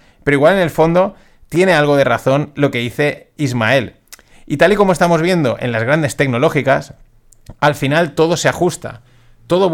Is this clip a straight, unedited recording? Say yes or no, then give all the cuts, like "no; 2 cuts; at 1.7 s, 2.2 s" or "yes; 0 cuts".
yes; 0 cuts